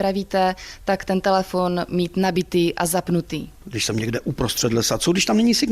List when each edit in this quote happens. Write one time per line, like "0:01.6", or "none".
none